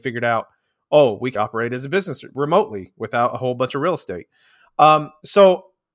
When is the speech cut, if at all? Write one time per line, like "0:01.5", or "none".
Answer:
0:01.4